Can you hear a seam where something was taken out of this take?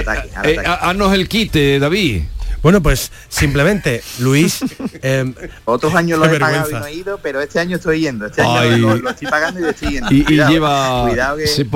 yes; 1 cut; at 5.7 s

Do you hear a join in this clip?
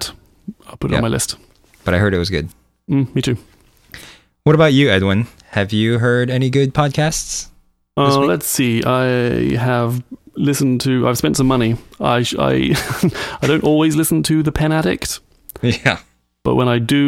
no; 0 cuts

